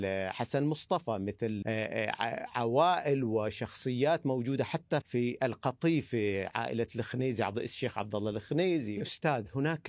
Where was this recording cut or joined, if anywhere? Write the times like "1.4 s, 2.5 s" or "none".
1.6 s, 5.0 s